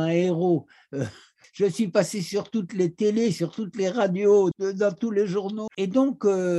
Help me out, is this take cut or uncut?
cut